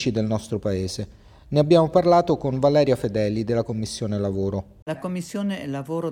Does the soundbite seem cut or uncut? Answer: uncut